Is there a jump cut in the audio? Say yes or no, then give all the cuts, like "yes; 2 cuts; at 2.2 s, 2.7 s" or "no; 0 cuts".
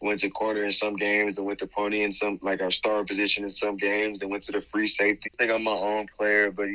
yes; 1 cut; at 5.2 s